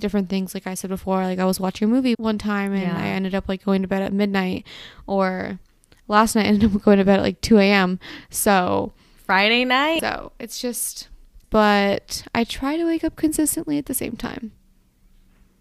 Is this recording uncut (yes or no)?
no